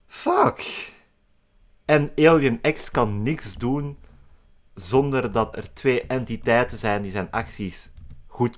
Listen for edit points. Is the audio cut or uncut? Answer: cut